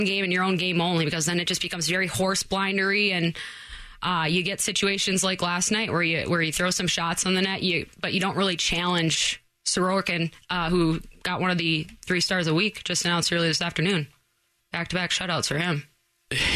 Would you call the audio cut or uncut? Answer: cut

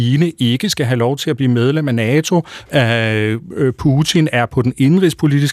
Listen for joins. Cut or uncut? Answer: cut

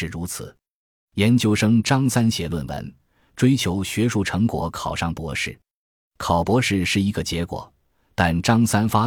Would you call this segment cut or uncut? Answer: uncut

